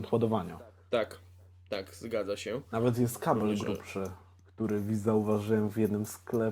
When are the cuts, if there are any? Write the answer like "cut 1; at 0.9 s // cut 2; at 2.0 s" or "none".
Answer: none